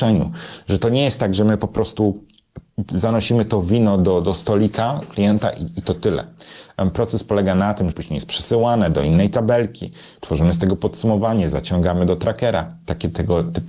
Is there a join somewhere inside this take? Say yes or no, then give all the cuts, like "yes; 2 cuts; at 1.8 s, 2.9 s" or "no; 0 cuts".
yes; 2 cuts; at 7.9 s, 10.2 s